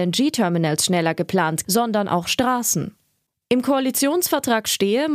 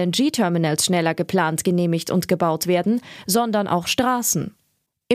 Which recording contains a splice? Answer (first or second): first